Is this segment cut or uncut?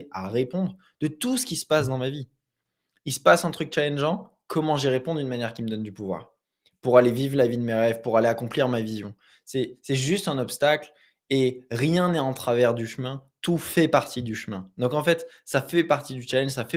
uncut